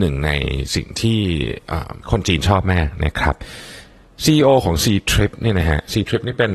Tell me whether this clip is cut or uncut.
cut